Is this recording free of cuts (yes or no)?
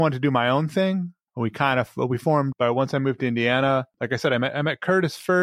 no